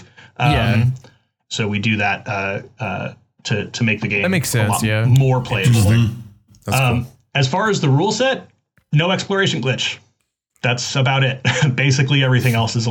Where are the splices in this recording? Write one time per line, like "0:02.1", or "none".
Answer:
0:01.5